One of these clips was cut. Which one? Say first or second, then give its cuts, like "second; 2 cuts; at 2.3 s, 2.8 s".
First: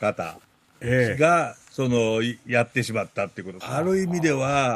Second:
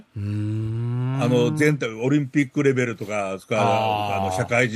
first; 1 cut; at 3.6 s